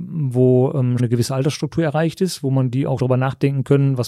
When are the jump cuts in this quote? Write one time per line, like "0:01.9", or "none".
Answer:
0:01.0
0:03.0

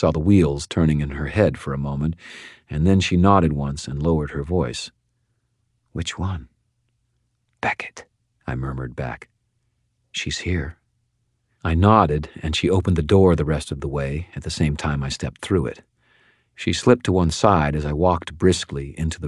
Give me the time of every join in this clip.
none

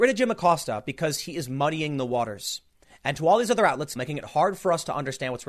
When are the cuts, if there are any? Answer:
0:04.0

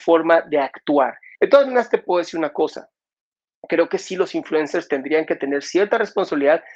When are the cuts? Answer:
0:01.3

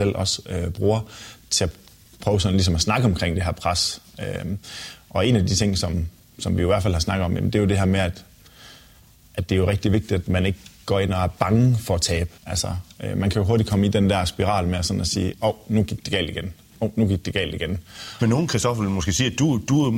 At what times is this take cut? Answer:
0:12.4
0:18.2

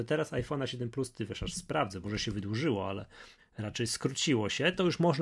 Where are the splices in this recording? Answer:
0:02.0
0:03.4

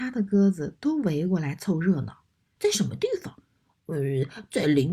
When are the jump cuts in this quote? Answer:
0:02.6

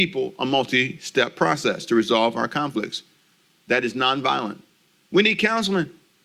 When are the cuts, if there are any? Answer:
0:05.0

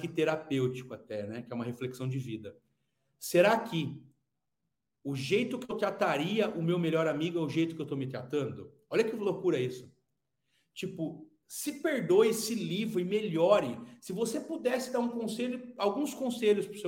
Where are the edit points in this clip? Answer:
none

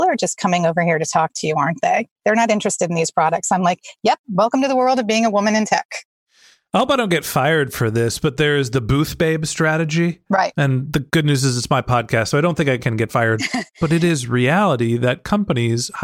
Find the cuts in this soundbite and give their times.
none

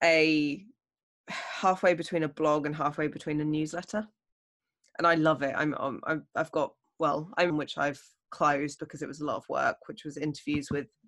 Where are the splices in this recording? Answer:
0:07.5
0:08.8

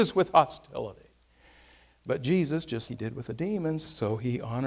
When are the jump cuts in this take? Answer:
0:02.9

